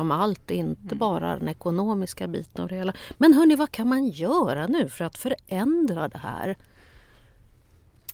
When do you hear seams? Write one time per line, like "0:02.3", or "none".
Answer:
none